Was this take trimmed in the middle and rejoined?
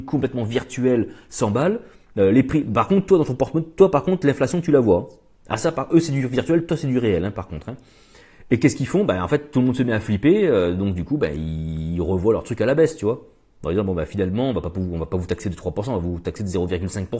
no; 0 cuts

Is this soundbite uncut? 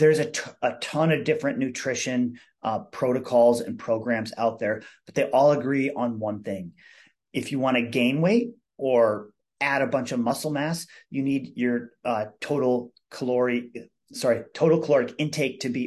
yes; 0 cuts

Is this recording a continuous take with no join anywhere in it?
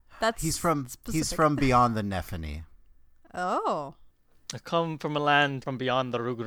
yes; 0 cuts

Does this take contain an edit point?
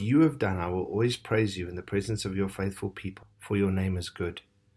yes; 1 cut; at 3.2 s

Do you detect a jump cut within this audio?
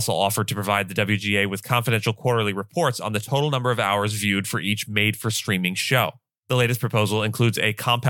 yes; 1 cut; at 6.4 s

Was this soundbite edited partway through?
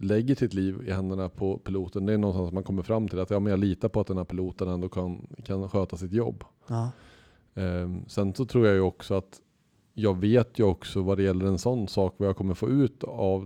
no; 0 cuts

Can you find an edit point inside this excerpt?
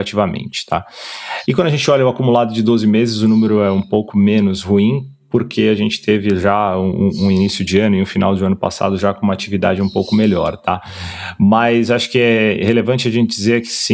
yes; 1 cut; at 1.4 s

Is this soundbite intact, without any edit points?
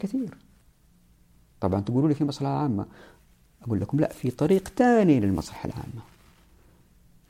no; 1 cut; at 1.5 s

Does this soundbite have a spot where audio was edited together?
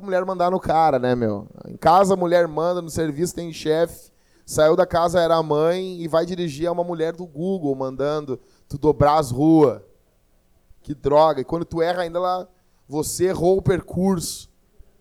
no; 0 cuts

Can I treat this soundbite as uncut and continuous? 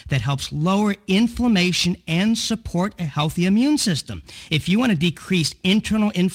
no; 1 cut; at 4.5 s

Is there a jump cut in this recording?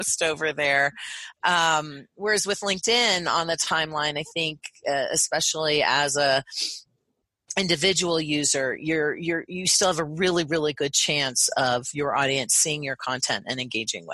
no; 0 cuts

